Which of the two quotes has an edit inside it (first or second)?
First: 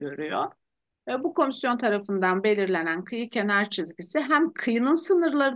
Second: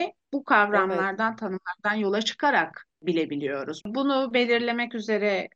second